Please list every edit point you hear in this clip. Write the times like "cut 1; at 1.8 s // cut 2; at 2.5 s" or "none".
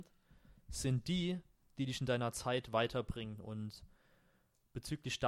none